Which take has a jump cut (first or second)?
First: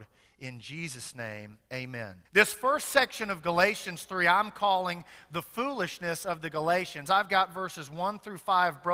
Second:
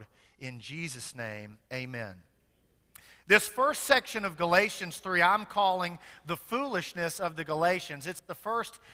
first